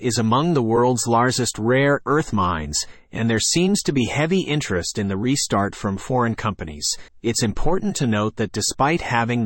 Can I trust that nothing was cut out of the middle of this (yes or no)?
no